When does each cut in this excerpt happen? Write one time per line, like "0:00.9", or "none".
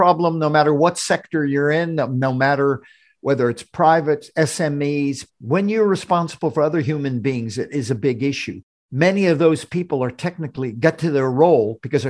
0:05.3